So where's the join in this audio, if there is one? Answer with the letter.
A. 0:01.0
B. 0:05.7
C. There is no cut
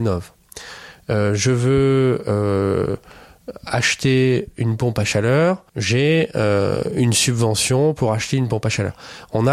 B